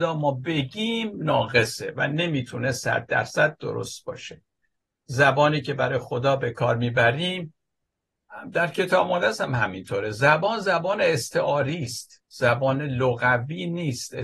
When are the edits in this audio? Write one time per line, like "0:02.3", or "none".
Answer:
0:12.2